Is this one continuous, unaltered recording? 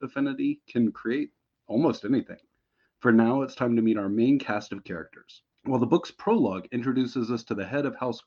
no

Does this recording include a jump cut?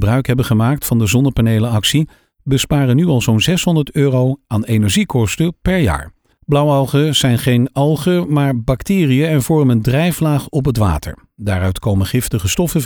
yes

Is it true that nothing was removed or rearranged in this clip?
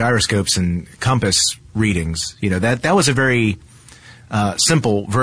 yes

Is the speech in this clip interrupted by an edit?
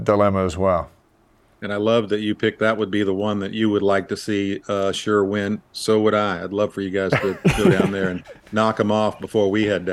no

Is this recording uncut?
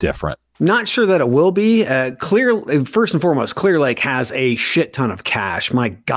yes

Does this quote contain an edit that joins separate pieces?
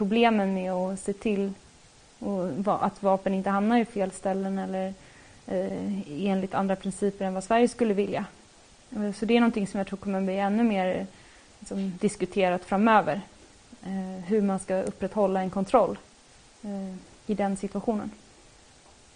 no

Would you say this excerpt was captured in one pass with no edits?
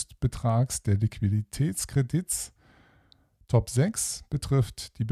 no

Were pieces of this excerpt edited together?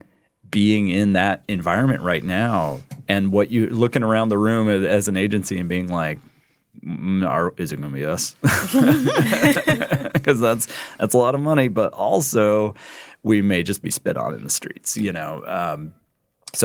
no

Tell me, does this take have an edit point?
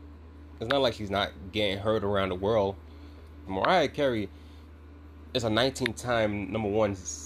yes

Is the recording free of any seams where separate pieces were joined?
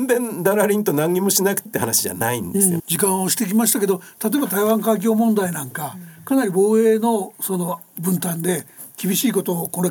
no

